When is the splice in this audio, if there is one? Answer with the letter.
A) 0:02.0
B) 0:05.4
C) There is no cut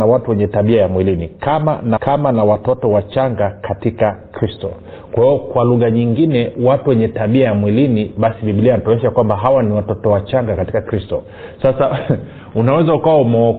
A